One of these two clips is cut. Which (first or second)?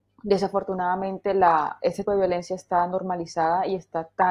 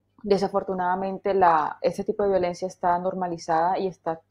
first